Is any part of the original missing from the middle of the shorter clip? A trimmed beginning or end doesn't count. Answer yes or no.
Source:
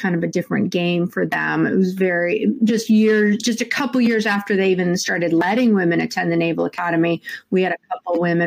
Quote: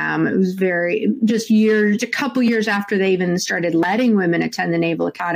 yes